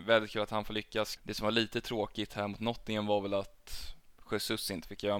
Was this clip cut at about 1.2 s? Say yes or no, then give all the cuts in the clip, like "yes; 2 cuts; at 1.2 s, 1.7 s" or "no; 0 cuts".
yes; 1 cut; at 1.2 s